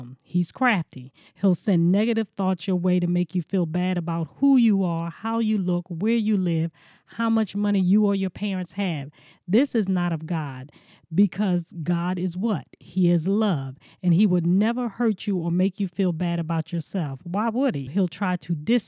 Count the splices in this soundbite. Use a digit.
2